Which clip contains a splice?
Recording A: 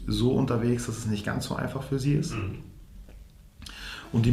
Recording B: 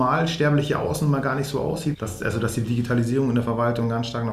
B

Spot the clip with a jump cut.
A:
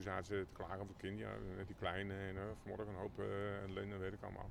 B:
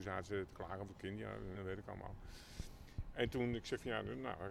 B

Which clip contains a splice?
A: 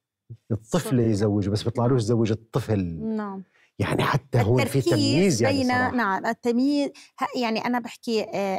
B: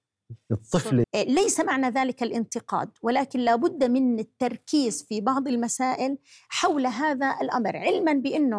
B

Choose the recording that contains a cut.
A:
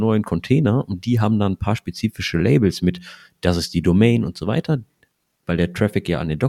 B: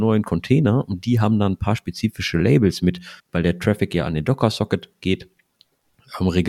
B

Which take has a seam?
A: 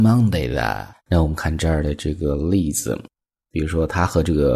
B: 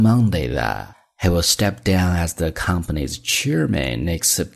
A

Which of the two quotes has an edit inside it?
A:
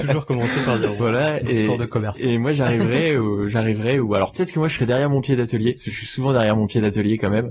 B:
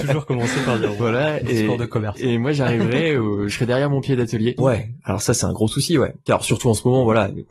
B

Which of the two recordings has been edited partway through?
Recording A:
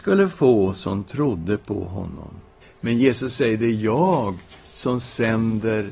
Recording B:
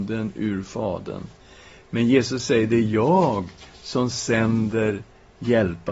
A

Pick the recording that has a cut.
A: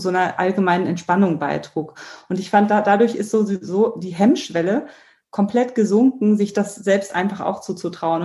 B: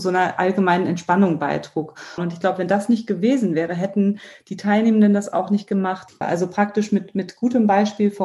B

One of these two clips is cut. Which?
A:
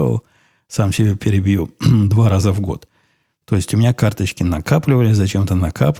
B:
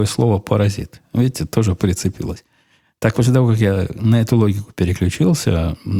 B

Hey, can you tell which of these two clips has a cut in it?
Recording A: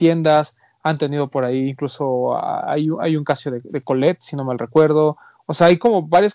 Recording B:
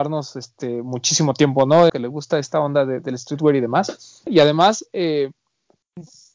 B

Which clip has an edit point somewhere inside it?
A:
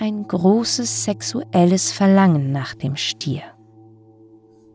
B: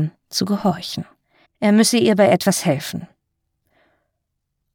B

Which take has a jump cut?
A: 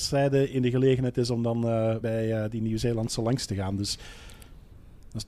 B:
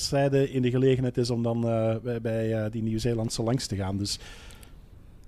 A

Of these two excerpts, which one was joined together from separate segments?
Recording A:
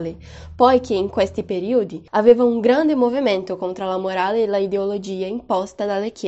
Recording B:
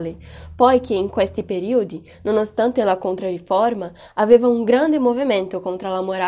A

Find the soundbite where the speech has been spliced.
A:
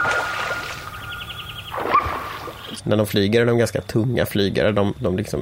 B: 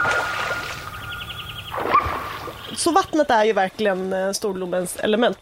A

